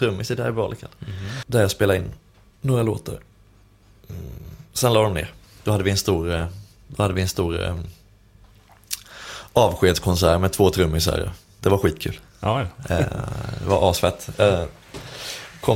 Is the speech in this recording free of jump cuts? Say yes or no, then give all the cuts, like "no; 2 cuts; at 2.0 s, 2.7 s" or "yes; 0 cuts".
no; 1 cut; at 1.4 s